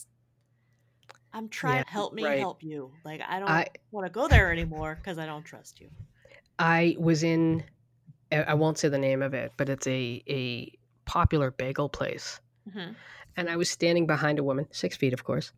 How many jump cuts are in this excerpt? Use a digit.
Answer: 1